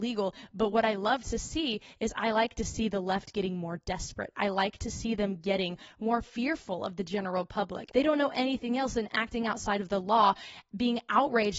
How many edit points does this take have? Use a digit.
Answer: 1